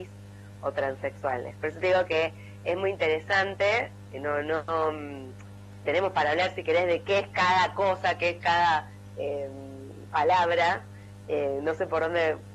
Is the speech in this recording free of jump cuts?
no; 1 cut; at 5.8 s

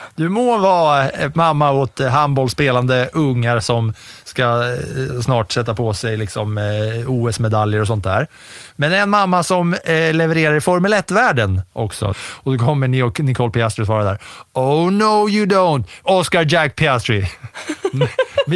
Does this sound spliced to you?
yes; 2 cuts; at 12.1 s, 16.0 s

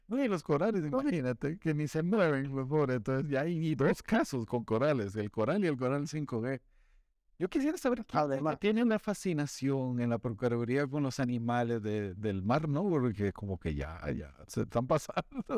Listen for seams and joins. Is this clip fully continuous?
yes; 0 cuts

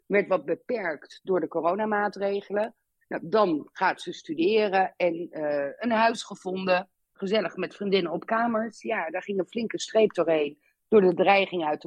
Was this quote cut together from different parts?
no; 0 cuts

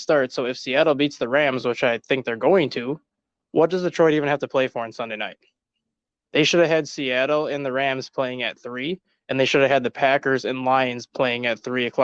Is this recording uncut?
yes; 0 cuts

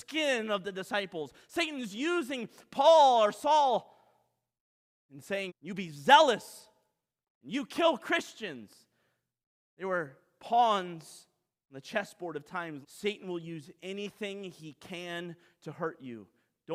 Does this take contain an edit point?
yes; 2 cuts; at 5.5 s, 12.8 s

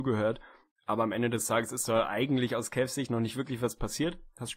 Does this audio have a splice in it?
no; 0 cuts

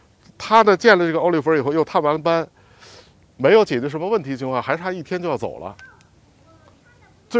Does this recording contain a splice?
no; 0 cuts

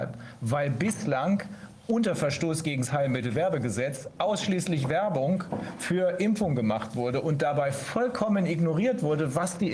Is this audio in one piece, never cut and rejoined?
yes; 0 cuts

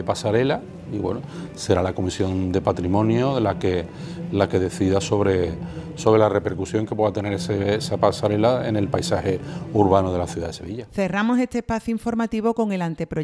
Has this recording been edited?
no; 0 cuts

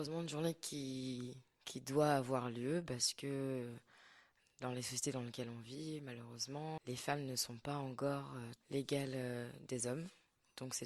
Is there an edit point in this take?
yes; 2 cuts; at 6.8 s, 8.6 s

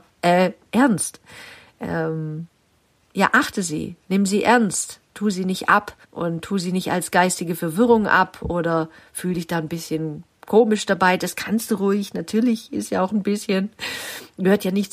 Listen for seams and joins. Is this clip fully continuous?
no; 1 cut; at 6.0 s

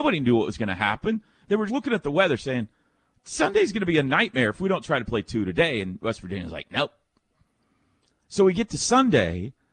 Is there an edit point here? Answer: yes; 1 cut; at 1.7 s

